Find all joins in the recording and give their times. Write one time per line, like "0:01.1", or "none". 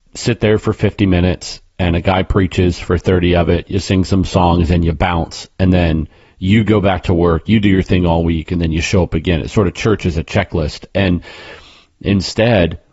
none